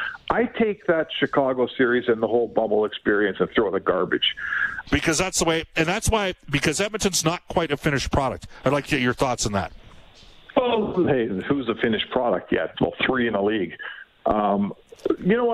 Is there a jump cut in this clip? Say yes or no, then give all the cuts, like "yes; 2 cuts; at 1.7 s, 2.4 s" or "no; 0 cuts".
yes; 2 cuts; at 4.8 s, 12.7 s